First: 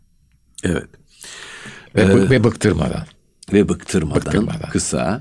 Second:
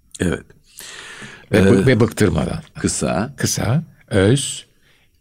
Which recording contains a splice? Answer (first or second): second